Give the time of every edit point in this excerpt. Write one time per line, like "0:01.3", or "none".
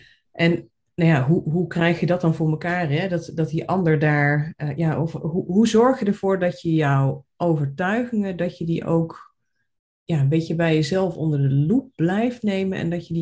none